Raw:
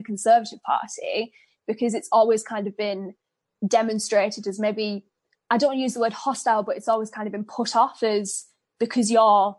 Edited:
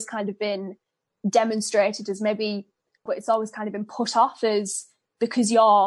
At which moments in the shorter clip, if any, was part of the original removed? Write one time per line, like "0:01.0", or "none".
0:03.1

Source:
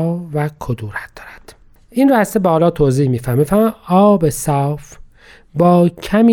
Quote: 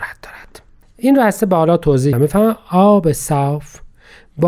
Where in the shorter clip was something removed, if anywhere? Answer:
0:02.1

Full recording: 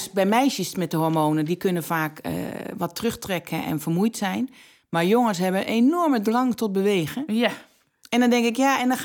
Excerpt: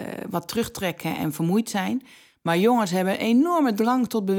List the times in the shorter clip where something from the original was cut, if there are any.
none

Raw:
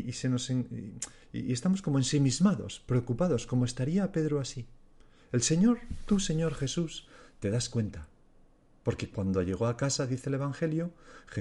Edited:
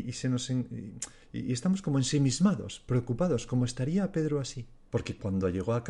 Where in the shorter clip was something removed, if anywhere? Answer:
0:04.9

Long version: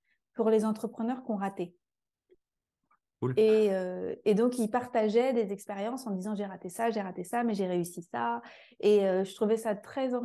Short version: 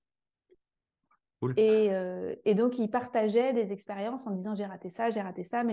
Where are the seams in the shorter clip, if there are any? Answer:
none

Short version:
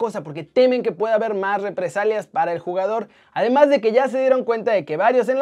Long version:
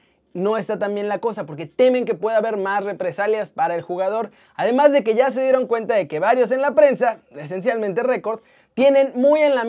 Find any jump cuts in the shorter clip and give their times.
none

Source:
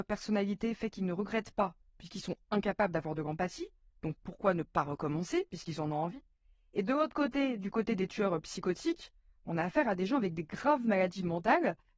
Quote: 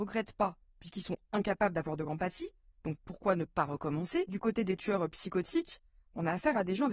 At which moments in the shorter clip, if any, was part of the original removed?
0:04.3

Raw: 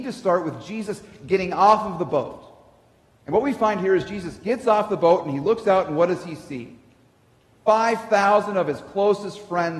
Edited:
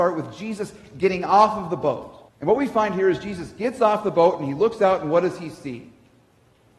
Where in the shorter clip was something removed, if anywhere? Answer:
0:02.3

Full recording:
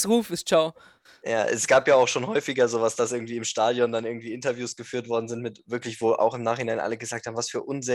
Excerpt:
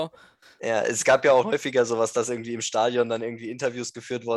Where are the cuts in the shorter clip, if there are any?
0:01.4

